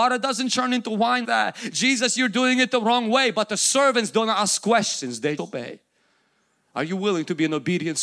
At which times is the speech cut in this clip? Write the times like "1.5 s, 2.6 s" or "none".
1.2 s, 5.4 s